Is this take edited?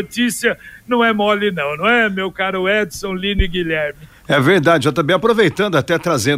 no; 0 cuts

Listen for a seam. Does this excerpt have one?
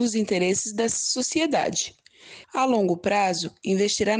yes; 1 cut; at 2.4 s

